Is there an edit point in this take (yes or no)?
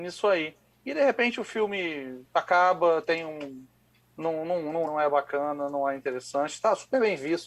yes